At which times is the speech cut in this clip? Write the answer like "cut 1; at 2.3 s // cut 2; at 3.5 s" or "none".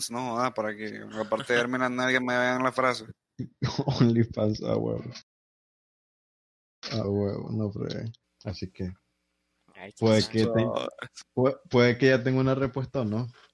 cut 1; at 7.0 s // cut 2; at 8.2 s